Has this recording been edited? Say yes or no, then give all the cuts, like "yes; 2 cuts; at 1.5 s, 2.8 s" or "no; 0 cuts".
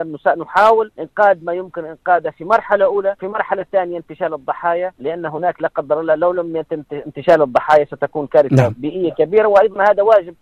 no; 0 cuts